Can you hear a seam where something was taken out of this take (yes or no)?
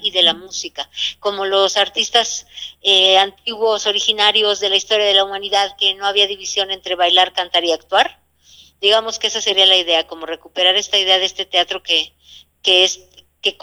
no